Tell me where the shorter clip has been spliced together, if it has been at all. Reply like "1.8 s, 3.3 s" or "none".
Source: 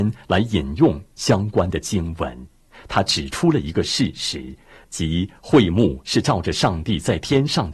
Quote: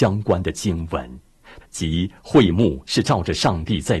1.6 s